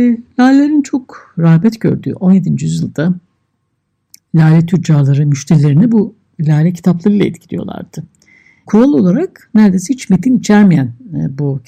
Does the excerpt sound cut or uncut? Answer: cut